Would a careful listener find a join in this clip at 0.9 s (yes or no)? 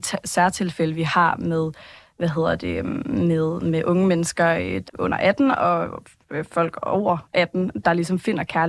no